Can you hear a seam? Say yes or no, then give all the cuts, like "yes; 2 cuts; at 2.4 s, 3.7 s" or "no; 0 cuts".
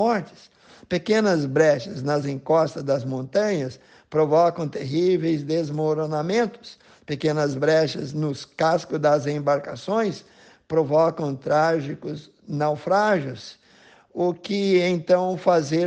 no; 0 cuts